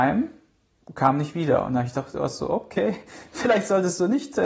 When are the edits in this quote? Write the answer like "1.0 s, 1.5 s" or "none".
none